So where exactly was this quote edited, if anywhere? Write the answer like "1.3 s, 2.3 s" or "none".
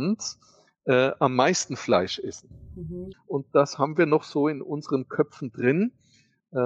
3.1 s